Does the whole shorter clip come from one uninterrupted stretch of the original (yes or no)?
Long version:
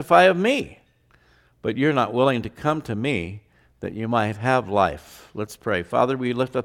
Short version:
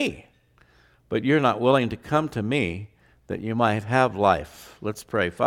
yes